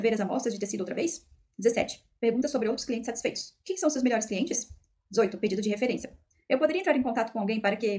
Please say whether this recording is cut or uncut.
uncut